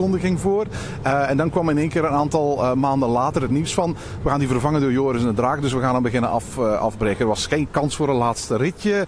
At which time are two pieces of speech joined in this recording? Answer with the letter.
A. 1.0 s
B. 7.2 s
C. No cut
C